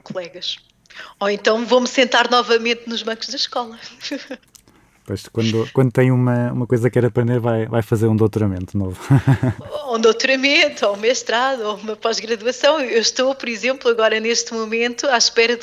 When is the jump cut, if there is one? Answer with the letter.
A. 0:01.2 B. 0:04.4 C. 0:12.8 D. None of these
D